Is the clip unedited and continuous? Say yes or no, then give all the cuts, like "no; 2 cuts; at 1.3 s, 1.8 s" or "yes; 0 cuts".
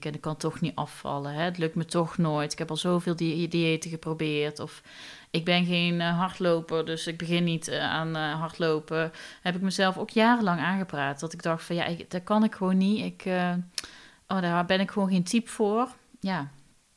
yes; 0 cuts